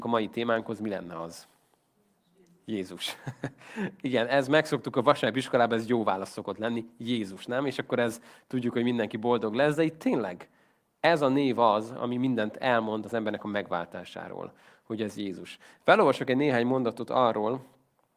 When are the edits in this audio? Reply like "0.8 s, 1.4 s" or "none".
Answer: none